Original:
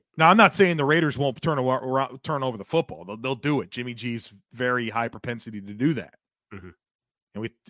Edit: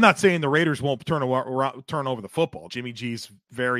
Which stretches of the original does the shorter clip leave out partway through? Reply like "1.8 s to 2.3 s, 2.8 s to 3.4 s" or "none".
3.0 s to 3.7 s